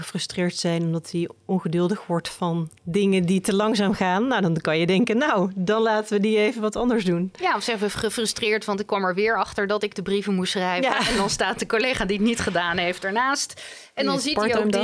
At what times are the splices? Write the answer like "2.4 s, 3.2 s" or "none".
none